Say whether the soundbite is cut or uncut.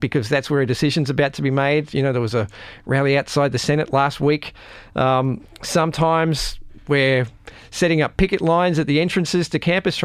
uncut